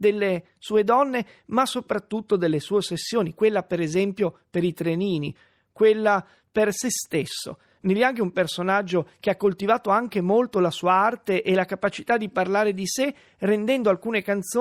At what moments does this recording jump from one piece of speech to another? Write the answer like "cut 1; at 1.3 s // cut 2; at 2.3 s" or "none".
none